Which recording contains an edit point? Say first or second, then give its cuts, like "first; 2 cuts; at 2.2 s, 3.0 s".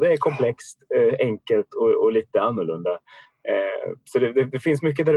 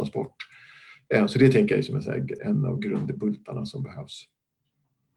second; 1 cut; at 2.4 s